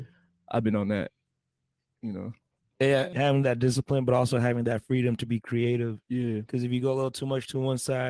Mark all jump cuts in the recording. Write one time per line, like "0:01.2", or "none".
0:03.1